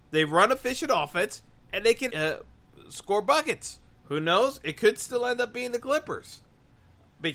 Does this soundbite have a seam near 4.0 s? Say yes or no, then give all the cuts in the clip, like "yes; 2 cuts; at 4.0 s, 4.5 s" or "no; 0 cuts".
yes; 2 cuts; at 2.1 s, 4.0 s